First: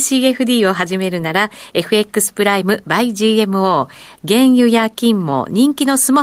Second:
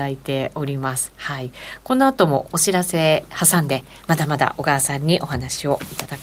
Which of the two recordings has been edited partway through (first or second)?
first